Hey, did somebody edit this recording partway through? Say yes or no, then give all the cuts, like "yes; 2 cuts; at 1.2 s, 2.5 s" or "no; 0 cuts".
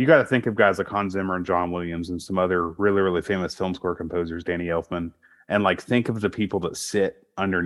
no; 0 cuts